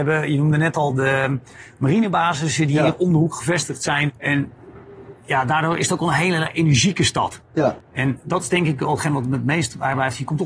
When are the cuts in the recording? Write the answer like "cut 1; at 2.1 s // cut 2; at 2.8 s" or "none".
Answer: cut 1; at 4.1 s